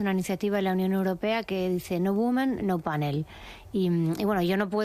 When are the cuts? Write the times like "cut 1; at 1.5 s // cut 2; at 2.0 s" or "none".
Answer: none